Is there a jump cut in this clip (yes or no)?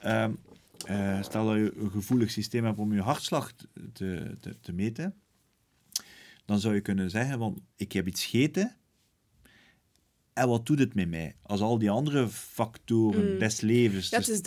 yes